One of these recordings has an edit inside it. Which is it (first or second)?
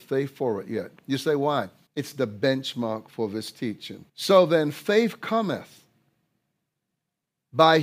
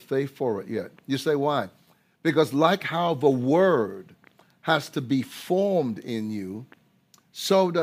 first